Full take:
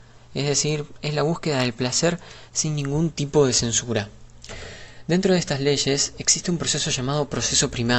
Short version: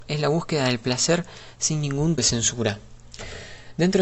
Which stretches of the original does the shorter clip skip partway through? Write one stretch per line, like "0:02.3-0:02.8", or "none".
0:03.1-0:03.5

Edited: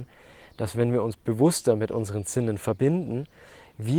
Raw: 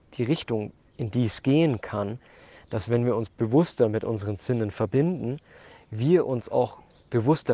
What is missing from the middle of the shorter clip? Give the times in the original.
none

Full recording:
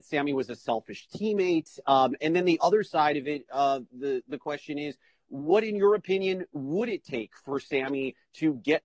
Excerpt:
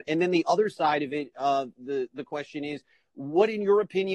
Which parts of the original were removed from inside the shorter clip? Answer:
none

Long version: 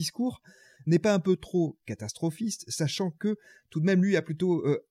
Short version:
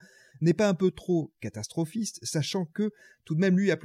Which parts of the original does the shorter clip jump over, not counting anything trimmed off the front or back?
none

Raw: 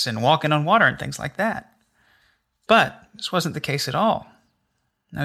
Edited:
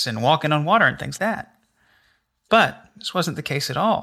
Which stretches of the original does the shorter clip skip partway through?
0:01.2-0:01.3

